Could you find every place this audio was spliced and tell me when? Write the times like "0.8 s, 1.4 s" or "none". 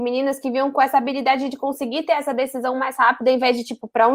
none